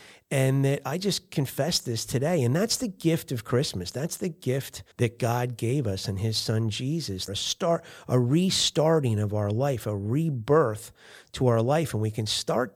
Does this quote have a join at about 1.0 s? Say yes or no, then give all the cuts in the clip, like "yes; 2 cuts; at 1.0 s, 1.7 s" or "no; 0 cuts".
no; 2 cuts; at 4.9 s, 7.3 s